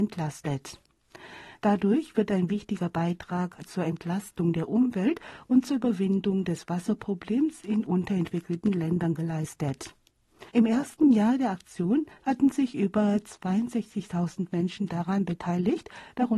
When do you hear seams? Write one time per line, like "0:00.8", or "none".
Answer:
0:10.5

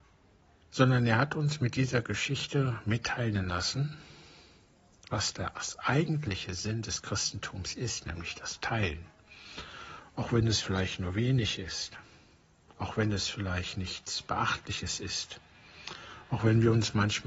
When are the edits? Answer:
none

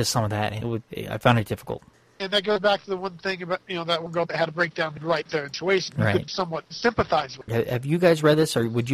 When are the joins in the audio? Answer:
0:07.5

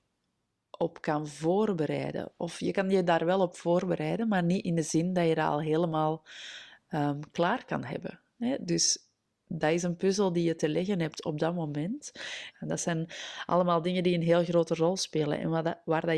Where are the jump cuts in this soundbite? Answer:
0:12.5

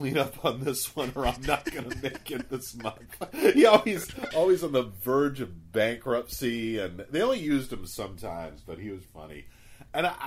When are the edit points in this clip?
0:04.3
0:09.0

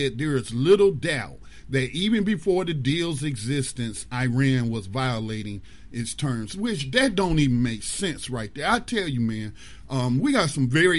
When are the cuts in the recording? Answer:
none

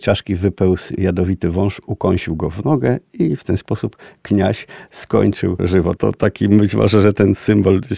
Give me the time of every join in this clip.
0:06.0

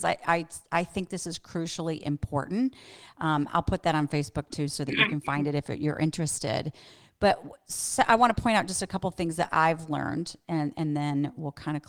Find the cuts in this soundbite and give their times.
none

